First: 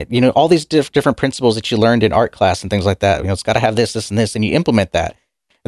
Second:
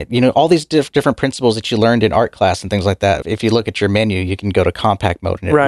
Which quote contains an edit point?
second; 1 cut; at 3.2 s

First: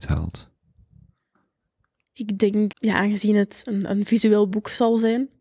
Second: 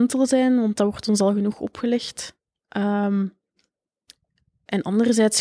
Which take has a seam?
first; 1 cut; at 2.7 s

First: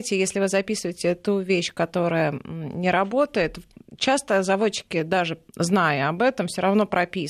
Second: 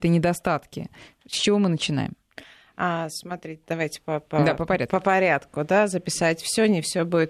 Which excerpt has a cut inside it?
first; 1 cut; at 5.5 s

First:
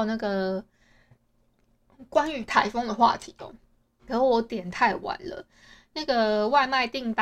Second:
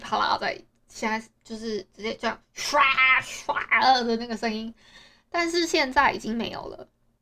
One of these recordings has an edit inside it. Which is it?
first; 1 cut; at 4.1 s

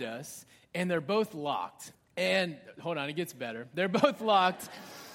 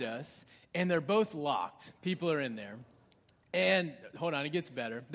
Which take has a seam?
first; 1 cut; at 1.9 s

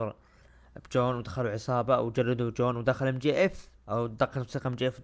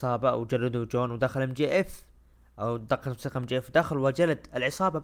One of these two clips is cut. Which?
first; 1 cut; at 3.8 s

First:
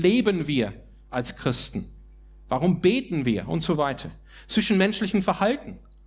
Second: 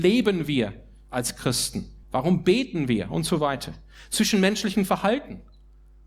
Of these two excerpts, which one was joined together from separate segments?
second; 1 cut; at 2.0 s

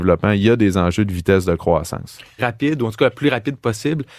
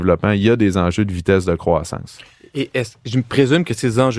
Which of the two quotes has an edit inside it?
first; 1 cut; at 2.4 s

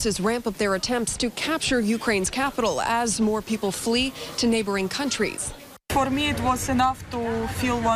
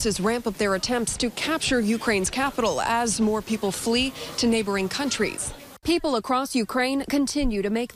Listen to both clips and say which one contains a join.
second; 1 cut; at 5.8 s

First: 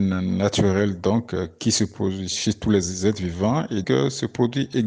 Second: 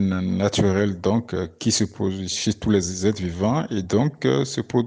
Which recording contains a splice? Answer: first; 1 cut; at 3.8 s

